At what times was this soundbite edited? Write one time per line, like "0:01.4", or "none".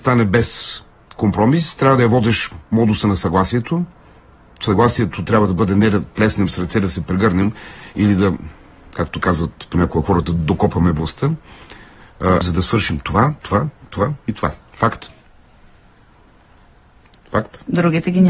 0:12.4
0:14.6